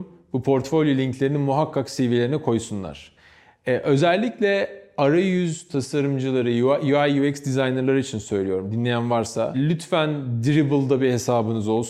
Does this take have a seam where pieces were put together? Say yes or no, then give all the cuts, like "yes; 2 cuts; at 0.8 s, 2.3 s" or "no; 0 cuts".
no; 0 cuts